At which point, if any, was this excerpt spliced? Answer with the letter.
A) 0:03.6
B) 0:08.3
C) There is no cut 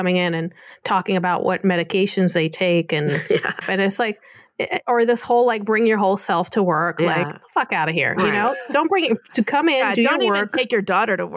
A